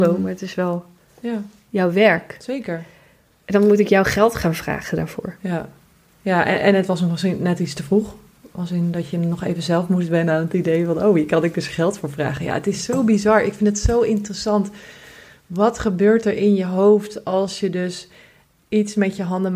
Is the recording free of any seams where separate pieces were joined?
yes; 0 cuts

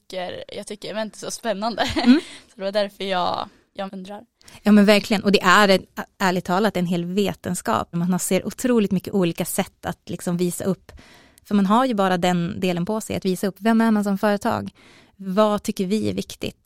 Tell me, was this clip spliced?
yes; 2 cuts; at 3.9 s, 7.9 s

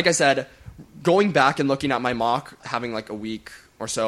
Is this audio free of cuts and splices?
no; 1 cut; at 2.6 s

